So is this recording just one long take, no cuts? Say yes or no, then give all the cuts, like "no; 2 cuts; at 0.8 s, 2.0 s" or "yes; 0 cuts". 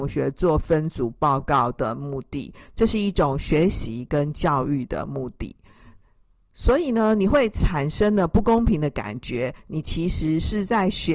yes; 0 cuts